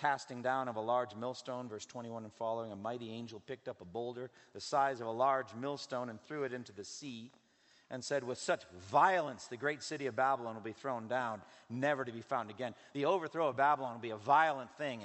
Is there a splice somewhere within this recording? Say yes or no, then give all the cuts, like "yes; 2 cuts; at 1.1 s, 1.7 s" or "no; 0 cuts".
no; 0 cuts